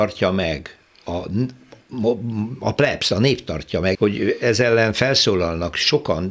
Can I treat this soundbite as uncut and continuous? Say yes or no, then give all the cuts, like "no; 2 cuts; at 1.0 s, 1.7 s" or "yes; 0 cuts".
no; 1 cut; at 3.9 s